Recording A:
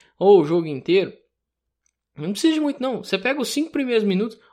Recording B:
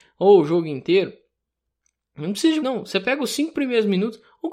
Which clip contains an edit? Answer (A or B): B